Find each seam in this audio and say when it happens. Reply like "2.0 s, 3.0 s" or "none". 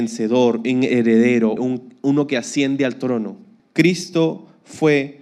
1.6 s, 3.6 s